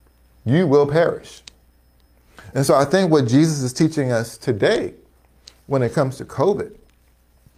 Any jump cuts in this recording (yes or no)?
no